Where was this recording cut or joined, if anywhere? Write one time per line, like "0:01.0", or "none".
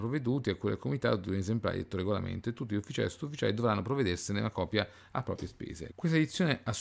0:05.9